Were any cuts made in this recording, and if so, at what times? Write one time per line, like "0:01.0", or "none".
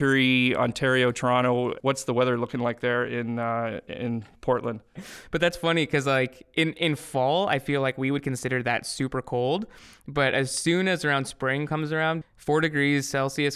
0:05.0
0:12.2

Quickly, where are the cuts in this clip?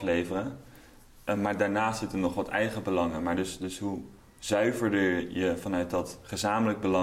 none

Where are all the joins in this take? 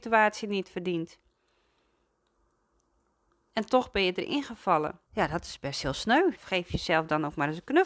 0:05.1
0:06.4

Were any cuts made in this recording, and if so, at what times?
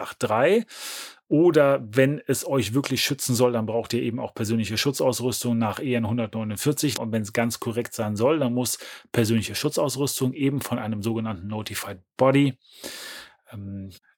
0:07.0

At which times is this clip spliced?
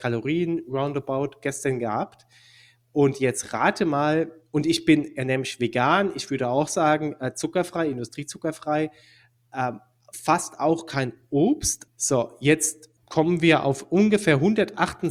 0:11.9
0:13.0

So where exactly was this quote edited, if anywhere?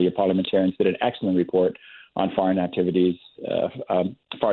none

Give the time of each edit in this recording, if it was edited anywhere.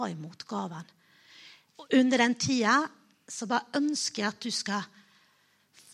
0:01.7

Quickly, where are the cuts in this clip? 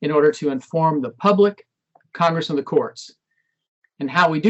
none

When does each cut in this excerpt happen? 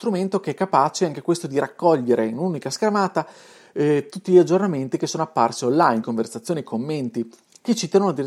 0:06.0

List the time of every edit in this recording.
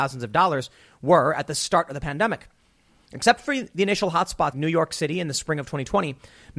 0:04.5

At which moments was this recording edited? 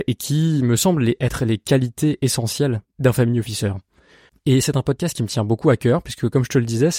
0:04.3

